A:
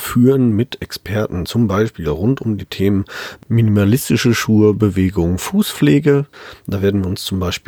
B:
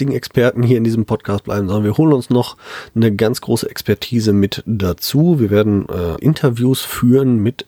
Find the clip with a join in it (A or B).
B